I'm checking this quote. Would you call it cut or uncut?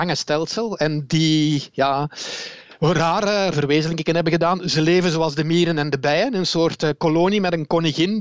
cut